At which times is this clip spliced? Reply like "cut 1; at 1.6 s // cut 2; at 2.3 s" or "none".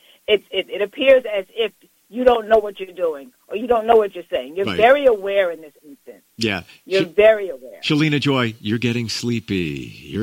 none